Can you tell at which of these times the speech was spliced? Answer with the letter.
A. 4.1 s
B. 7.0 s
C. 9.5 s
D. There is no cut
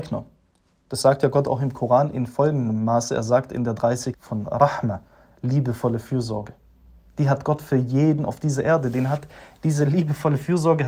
A